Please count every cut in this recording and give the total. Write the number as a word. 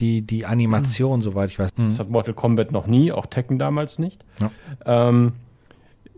one